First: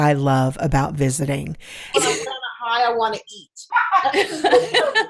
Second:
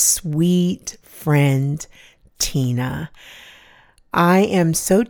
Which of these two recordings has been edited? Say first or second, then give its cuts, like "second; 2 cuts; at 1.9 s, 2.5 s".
first; 2 cuts; at 1.9 s, 3.7 s